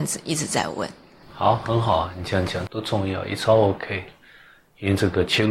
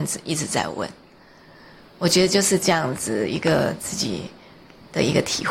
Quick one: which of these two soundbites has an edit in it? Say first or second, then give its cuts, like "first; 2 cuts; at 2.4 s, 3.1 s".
first; 2 cuts; at 1.2 s, 2.7 s